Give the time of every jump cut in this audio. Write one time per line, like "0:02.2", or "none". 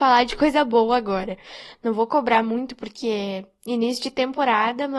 none